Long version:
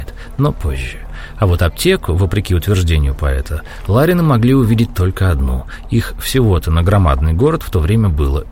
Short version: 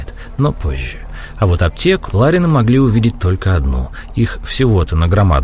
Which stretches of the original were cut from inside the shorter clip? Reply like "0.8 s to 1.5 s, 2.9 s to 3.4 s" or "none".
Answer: 2.1 s to 3.8 s